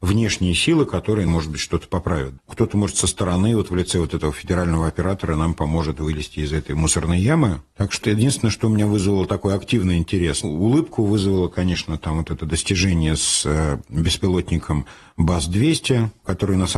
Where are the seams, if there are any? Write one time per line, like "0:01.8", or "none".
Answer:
0:08.0
0:10.4

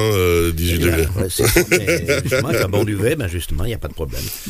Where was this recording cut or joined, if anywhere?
0:01.1

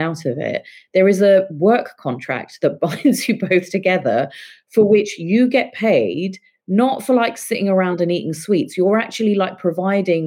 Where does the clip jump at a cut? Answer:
none

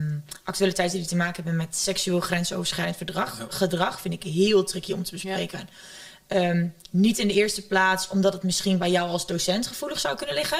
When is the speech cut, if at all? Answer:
none

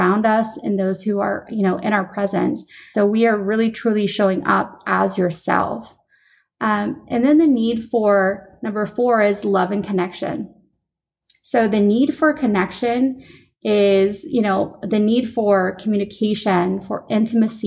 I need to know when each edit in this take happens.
0:02.9

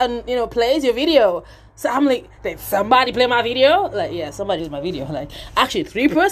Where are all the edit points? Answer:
0:04.6

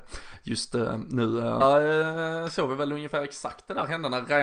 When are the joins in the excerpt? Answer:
0:01.6

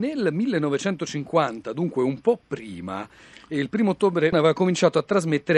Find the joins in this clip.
0:04.3

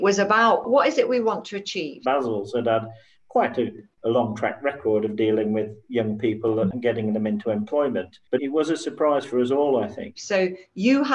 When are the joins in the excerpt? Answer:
0:02.0
0:10.1

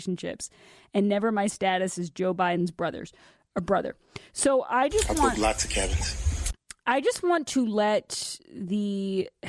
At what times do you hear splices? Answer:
none

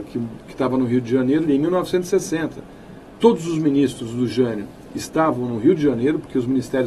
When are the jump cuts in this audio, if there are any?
0:01.5
0:03.2

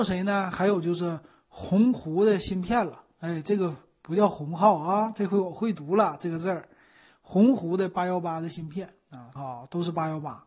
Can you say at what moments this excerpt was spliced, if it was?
0:09.4

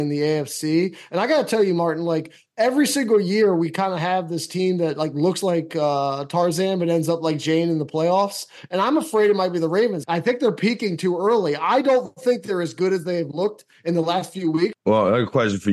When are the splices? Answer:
0:10.0
0:14.7

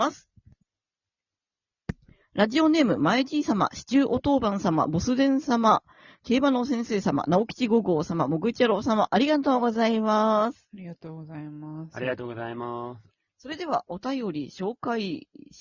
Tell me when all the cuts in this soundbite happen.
none

